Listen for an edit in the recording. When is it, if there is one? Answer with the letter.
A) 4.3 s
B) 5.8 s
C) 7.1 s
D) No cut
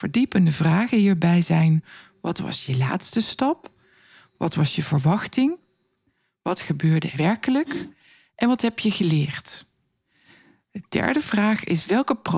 C